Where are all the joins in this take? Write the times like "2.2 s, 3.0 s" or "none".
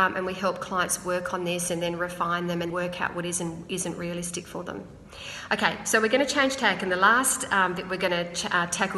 2.7 s